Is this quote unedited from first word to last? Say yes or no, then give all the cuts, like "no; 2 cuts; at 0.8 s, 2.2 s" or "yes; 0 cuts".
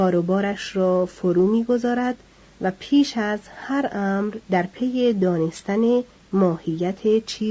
no; 1 cut; at 4.4 s